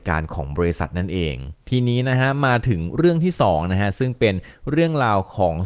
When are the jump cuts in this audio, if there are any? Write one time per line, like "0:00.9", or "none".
0:01.6

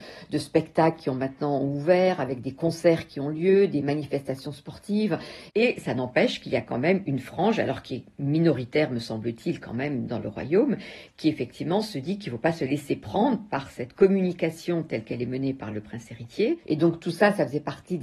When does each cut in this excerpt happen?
0:05.5
0:16.6

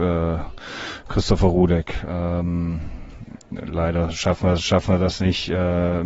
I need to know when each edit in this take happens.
none

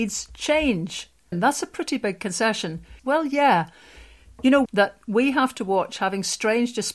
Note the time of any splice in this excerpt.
0:01.3
0:03.0
0:04.7

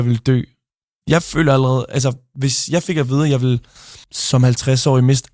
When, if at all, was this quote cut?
0:04.0

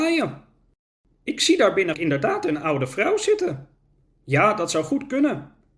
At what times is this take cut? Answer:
0:01.9
0:04.1

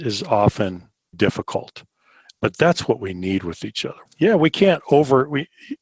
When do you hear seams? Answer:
0:01.1
0:04.1

